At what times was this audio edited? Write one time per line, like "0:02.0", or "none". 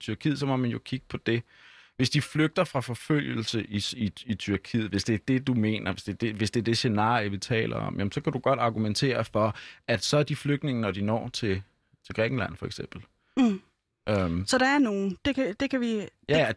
none